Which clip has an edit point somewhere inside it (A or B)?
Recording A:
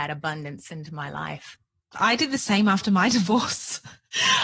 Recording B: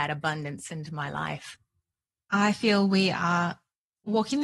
A